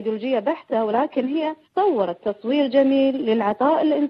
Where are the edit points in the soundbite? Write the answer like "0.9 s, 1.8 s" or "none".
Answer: 1.6 s